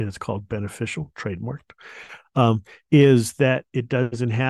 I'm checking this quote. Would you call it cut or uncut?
uncut